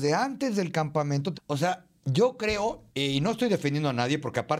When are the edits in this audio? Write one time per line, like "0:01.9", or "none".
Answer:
0:01.3
0:02.9